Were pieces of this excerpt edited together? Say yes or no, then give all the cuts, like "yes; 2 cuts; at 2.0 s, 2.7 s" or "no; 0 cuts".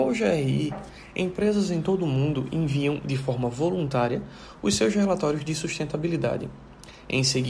no; 0 cuts